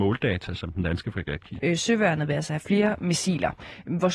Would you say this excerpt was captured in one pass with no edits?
no; 1 cut; at 1.6 s

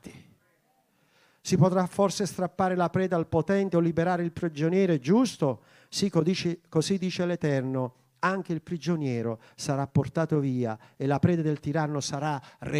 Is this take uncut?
yes; 0 cuts

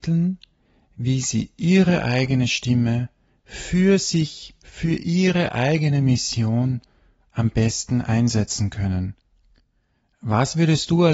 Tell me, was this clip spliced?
no; 0 cuts

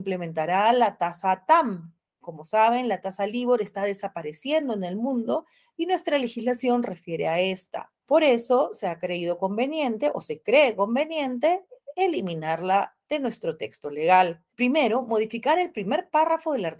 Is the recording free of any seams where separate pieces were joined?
no; 1 cut; at 14.5 s

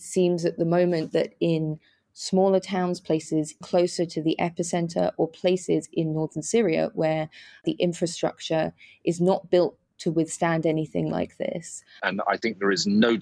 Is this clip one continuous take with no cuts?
no; 2 cuts; at 3.6 s, 12.0 s

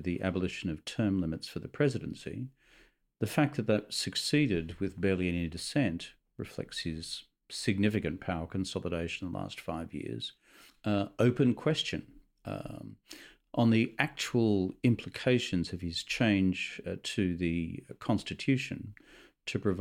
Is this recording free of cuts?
no; 1 cut; at 10.7 s

